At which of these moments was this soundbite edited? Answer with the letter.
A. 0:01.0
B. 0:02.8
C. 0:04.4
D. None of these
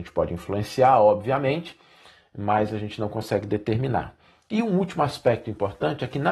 D